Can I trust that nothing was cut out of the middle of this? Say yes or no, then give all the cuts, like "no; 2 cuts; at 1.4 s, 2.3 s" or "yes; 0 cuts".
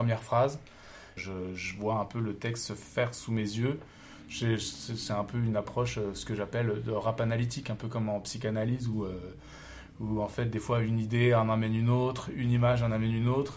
no; 1 cut; at 1.2 s